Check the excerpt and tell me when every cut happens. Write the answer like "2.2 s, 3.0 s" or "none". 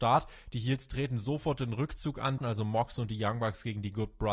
2.4 s